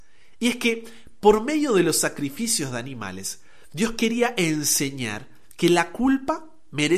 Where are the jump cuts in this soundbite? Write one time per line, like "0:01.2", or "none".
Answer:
none